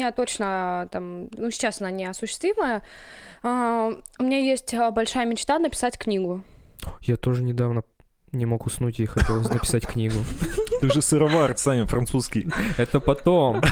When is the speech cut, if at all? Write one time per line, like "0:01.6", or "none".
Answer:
none